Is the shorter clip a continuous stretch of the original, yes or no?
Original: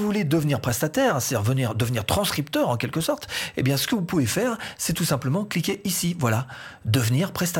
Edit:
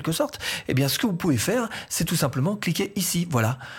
yes